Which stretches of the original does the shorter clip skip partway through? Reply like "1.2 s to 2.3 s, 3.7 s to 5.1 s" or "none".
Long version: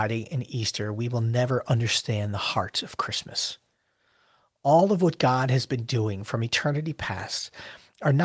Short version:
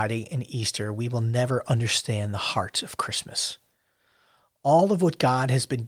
none